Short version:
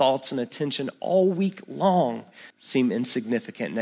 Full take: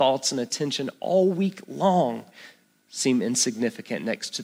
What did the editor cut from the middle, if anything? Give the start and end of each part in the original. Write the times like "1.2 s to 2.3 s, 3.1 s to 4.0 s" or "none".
2.5 s to 2.8 s